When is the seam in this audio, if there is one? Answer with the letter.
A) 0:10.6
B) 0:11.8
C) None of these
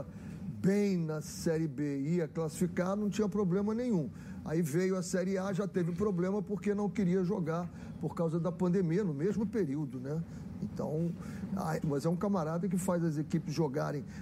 B